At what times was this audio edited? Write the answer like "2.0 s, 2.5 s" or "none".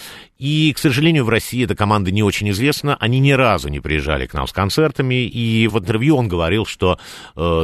5.7 s